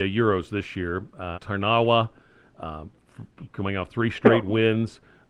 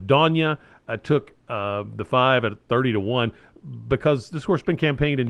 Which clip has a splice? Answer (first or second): first